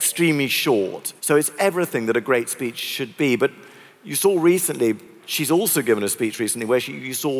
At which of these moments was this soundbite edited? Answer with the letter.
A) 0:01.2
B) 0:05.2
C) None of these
A